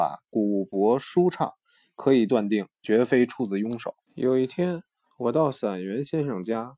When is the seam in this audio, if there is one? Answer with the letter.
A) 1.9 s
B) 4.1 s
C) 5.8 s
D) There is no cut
B